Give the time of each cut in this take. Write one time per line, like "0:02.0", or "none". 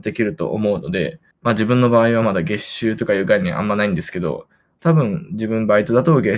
0:01.3